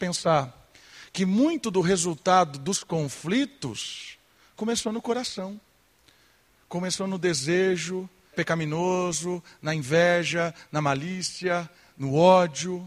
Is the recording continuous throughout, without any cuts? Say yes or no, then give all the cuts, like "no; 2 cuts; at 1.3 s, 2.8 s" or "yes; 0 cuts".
no; 1 cut; at 8.3 s